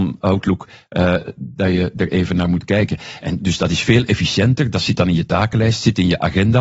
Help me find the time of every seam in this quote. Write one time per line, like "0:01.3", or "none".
none